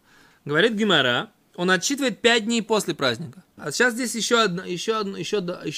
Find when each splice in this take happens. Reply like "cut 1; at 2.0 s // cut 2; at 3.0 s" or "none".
cut 1; at 3.6 s

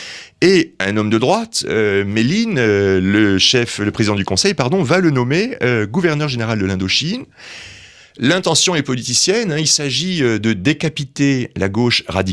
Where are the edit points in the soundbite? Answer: none

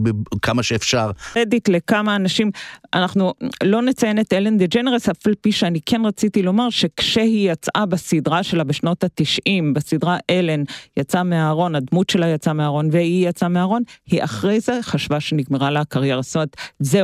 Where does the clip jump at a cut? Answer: cut 1; at 1.4 s

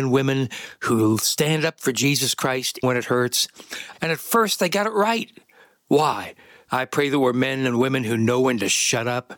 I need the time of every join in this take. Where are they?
cut 1; at 2.8 s // cut 2; at 3.9 s // cut 3; at 6.7 s

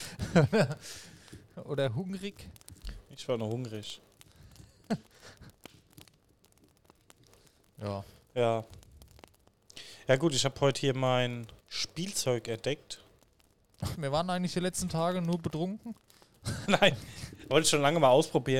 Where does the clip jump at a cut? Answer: cut 1; at 11.6 s // cut 2; at 13.9 s // cut 3; at 16.6 s

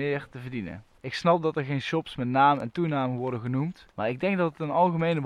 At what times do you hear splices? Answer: cut 1; at 1.0 s // cut 2; at 3.9 s

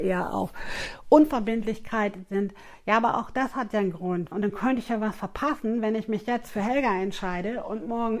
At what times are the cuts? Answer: cut 1; at 4.3 s

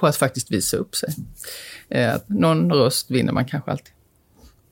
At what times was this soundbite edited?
none

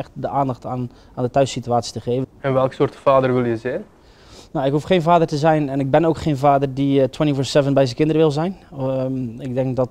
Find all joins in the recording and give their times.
cut 1; at 2.2 s

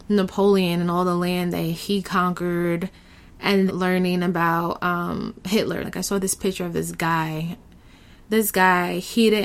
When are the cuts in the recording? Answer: cut 1; at 3.7 s // cut 2; at 5.8 s // cut 3; at 8.2 s

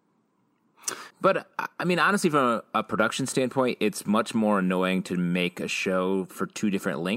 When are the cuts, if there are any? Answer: cut 1; at 1.1 s

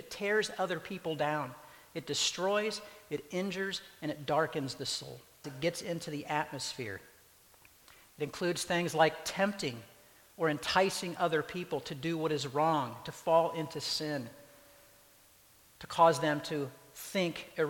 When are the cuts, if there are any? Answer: cut 1; at 5.4 s

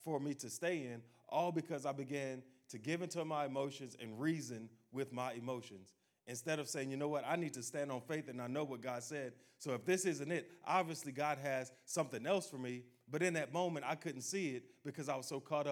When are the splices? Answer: none

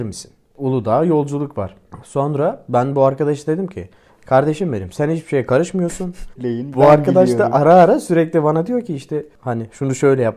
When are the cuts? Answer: cut 1; at 6.4 s

